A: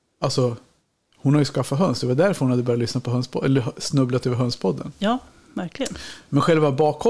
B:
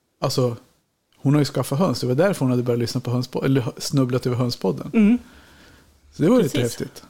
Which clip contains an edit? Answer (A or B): A